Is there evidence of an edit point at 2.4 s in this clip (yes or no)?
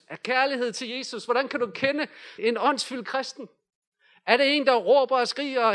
yes